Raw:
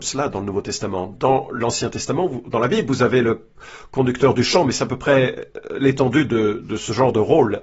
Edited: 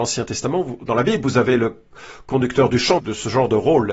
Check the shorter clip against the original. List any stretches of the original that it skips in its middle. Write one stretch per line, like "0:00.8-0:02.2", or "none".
0:04.6-0:06.6